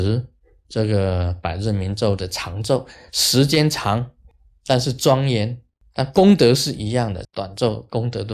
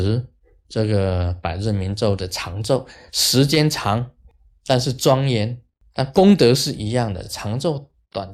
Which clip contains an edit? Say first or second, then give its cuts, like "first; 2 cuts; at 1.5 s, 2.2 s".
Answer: first; 1 cut; at 7.2 s